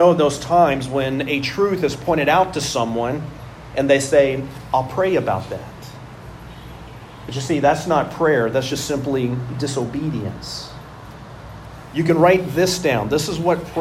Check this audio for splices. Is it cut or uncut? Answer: uncut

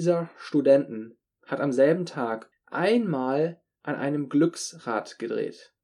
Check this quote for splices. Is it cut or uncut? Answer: cut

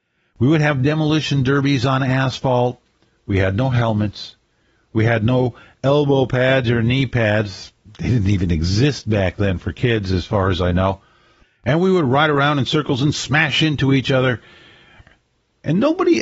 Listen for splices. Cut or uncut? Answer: uncut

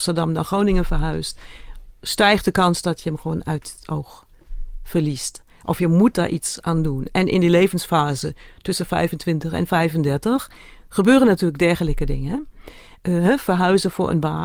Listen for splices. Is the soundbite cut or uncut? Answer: uncut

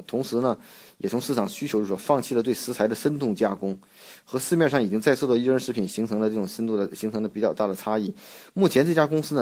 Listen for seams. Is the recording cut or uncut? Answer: uncut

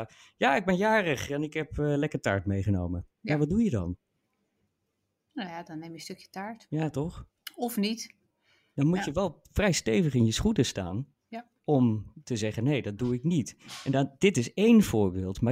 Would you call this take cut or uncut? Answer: uncut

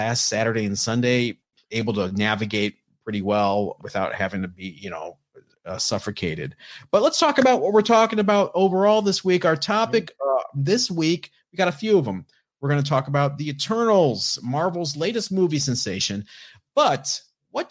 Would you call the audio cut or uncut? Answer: cut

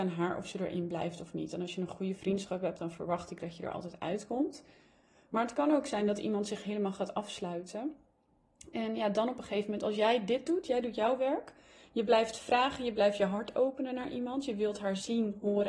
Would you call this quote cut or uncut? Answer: uncut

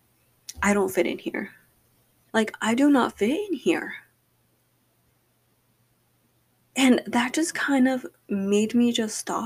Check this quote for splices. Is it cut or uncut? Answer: cut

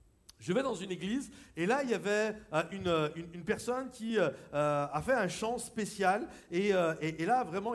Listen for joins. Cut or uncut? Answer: uncut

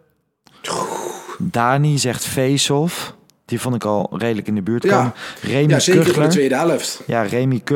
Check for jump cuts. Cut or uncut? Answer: uncut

